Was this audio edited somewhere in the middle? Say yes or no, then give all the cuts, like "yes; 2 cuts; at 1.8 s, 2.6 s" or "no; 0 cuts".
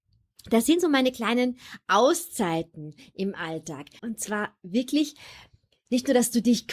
yes; 1 cut; at 4.0 s